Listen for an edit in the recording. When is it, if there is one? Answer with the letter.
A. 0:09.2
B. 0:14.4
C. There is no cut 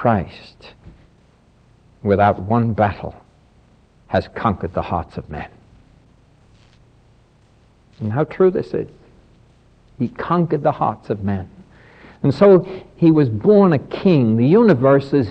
C